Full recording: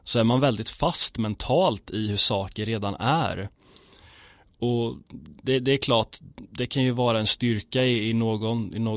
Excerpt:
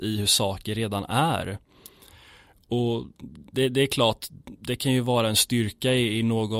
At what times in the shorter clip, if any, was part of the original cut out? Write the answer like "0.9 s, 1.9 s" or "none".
none

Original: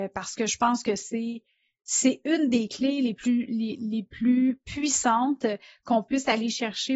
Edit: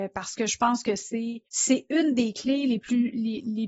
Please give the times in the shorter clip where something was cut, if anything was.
1.5 s

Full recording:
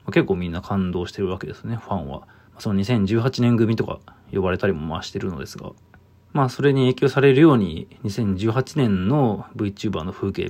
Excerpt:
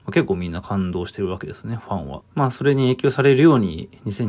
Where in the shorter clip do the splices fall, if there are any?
2.2 s

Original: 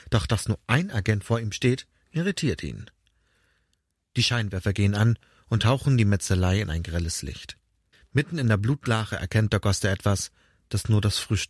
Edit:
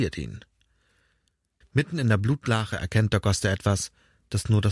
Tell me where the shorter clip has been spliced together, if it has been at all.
1.6 s

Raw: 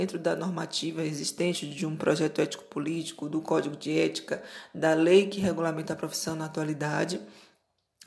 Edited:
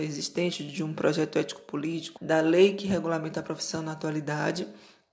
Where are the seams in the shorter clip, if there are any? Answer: 2.2 s

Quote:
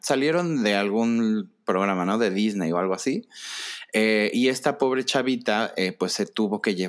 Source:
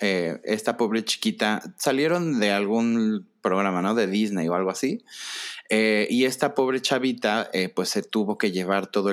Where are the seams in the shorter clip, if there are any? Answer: none

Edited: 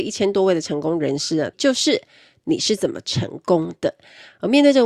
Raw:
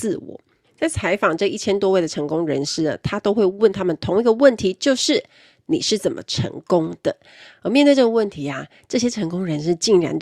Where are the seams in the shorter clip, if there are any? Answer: 1.5 s

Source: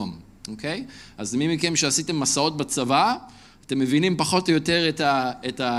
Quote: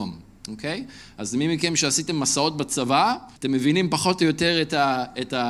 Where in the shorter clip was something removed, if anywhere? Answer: 3.3 s

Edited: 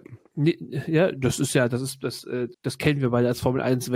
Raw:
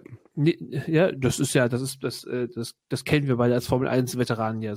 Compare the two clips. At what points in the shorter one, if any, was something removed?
2.5 s

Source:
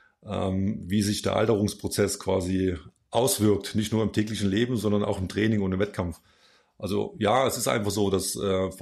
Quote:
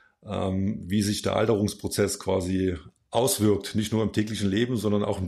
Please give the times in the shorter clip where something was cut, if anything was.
none

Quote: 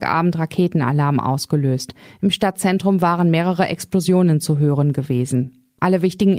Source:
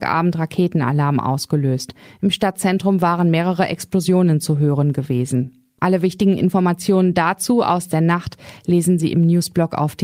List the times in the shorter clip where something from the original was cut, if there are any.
none

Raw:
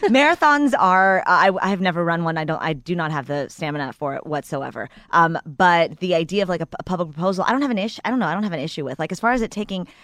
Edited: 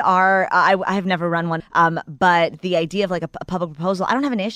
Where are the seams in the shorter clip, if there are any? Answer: 1.6 s

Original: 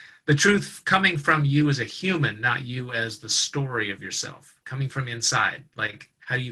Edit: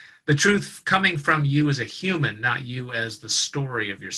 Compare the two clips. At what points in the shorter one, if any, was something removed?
none

